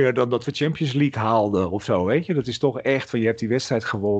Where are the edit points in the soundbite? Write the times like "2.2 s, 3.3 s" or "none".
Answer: none